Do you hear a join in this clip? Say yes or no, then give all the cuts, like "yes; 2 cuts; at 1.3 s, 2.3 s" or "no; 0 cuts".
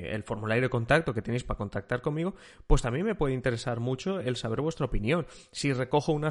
no; 0 cuts